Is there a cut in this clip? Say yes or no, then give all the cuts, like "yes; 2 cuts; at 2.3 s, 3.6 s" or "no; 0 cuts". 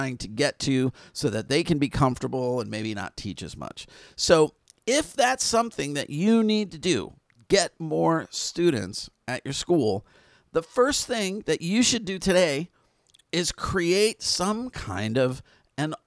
no; 0 cuts